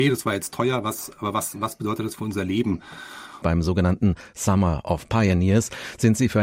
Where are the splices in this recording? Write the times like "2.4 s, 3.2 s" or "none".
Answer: 3.4 s